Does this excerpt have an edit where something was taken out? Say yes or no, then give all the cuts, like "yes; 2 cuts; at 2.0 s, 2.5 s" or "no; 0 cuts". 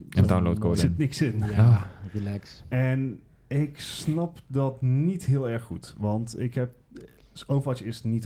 no; 0 cuts